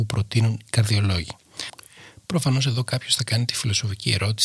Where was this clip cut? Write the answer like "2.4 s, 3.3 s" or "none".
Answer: none